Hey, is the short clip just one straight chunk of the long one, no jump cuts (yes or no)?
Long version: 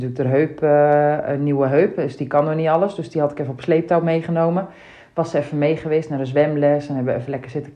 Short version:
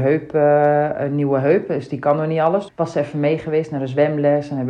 no